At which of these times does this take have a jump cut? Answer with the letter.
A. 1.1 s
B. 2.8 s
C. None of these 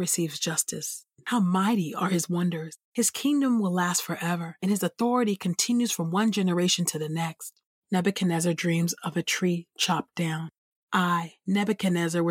A